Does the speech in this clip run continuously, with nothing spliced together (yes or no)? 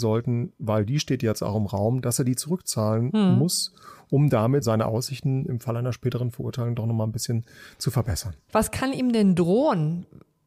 yes